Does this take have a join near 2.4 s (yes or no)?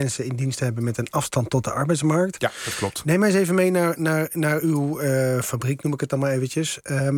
no